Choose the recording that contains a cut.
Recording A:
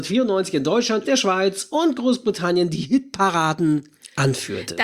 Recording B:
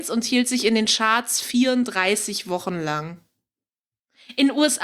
A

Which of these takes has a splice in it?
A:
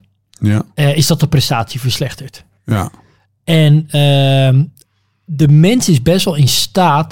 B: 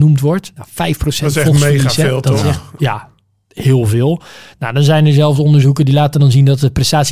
B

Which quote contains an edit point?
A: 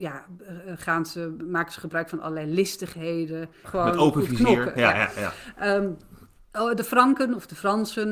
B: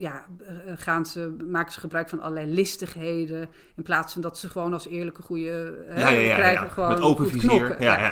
A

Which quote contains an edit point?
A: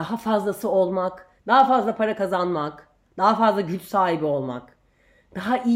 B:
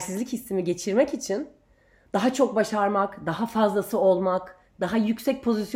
A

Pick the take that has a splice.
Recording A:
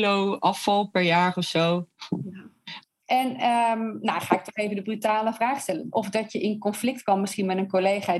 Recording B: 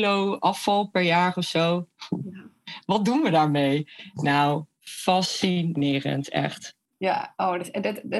A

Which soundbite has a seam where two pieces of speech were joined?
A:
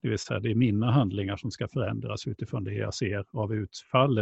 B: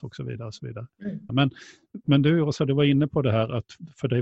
B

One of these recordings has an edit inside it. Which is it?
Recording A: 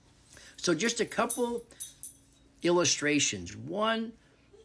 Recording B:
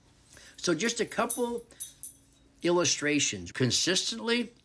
B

